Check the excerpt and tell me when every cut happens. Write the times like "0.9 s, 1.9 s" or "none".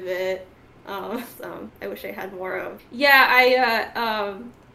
1.4 s, 2.8 s